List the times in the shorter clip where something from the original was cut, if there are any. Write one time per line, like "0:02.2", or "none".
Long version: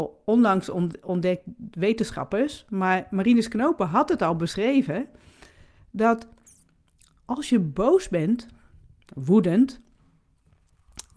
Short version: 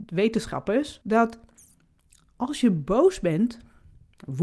0:01.0